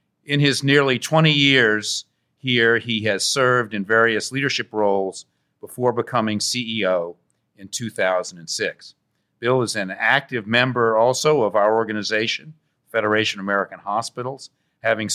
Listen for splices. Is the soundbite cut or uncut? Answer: uncut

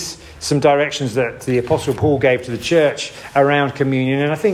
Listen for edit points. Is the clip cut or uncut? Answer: uncut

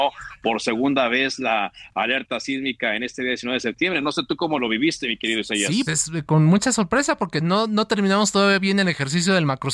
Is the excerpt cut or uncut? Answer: cut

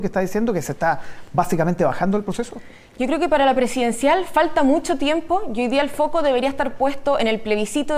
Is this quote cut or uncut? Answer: uncut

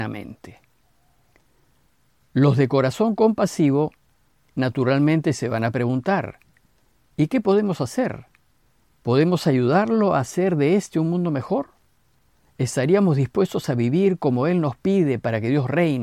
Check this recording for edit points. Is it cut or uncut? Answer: uncut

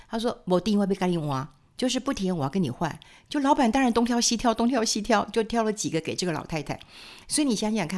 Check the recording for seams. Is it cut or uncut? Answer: uncut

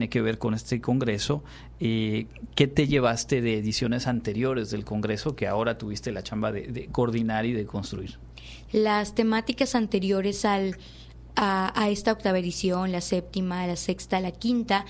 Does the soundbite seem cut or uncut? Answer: cut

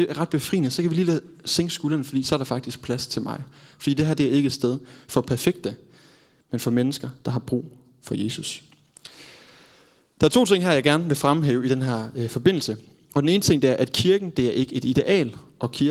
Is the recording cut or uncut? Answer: uncut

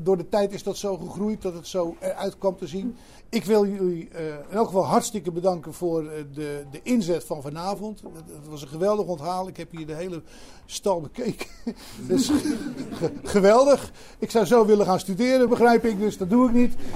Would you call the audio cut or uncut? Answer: cut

